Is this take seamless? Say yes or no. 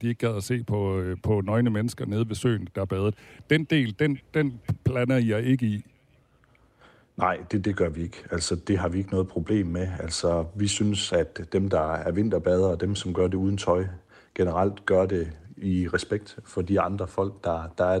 yes